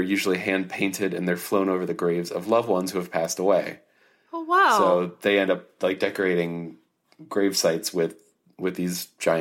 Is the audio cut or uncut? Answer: uncut